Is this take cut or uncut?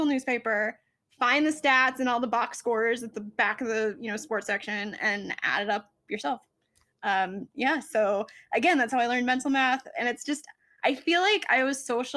uncut